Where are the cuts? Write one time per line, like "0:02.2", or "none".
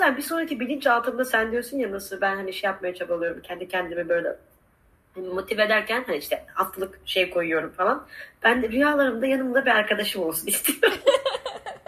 none